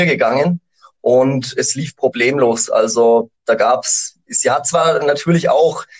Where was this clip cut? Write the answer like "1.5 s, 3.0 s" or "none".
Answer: none